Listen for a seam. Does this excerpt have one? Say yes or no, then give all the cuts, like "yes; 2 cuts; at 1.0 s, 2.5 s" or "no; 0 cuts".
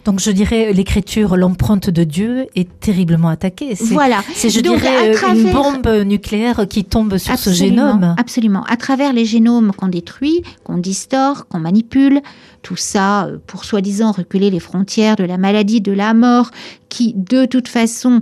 no; 0 cuts